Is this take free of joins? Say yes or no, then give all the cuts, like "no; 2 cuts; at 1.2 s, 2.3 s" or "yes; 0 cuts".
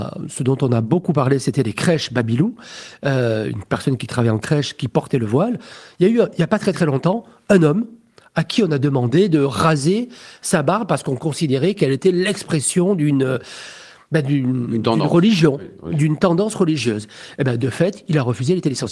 yes; 0 cuts